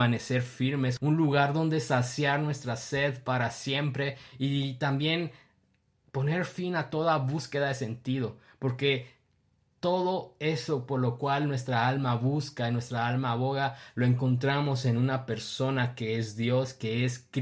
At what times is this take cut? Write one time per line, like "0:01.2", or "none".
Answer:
0:01.0